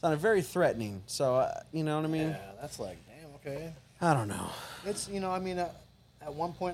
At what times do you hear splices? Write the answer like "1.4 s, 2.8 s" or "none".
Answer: none